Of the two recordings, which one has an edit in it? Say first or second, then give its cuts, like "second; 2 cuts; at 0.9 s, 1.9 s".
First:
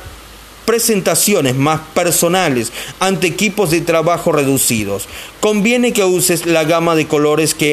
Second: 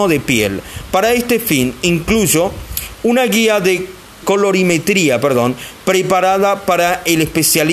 second; 1 cut; at 4.2 s